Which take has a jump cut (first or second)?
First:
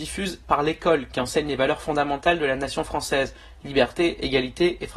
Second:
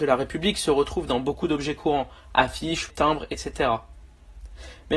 second